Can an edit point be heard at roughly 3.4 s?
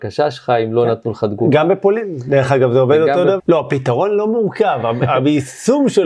yes; 1 cut; at 3.4 s

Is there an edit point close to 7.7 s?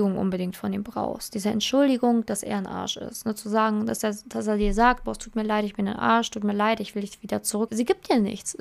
yes; 1 cut; at 7.7 s

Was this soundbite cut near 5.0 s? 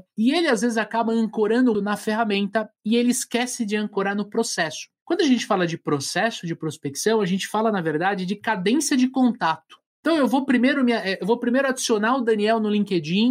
no; 1 cut; at 1.7 s

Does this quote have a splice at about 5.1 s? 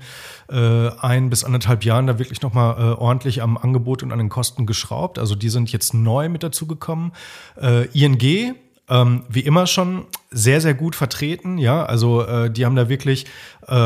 no; 0 cuts

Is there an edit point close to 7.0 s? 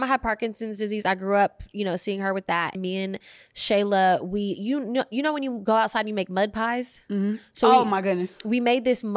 no; 1 cut; at 2.7 s

